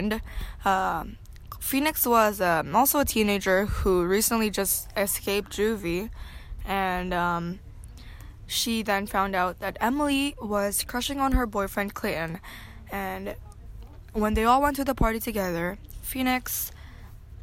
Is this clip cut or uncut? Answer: uncut